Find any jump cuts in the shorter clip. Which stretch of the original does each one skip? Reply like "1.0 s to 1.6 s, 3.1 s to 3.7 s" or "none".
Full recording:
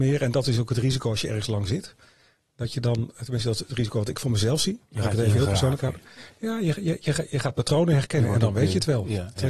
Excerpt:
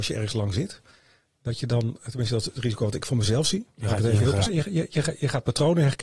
5.6 s to 6.6 s